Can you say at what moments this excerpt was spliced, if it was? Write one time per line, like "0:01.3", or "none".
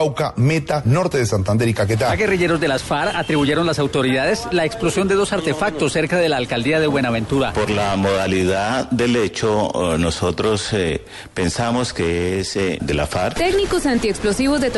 0:12.8